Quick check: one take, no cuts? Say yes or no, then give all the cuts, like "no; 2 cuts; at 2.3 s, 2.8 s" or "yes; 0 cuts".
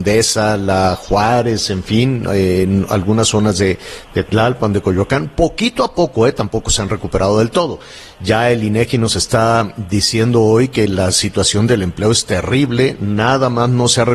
yes; 0 cuts